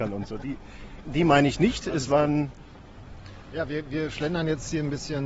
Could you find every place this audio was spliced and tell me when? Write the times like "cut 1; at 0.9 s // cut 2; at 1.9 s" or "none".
cut 1; at 1.0 s